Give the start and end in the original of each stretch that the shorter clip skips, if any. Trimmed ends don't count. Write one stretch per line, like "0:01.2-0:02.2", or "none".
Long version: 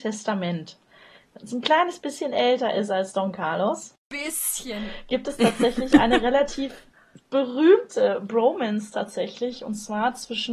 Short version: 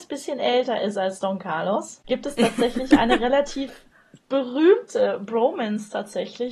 0:04.0-0:05.1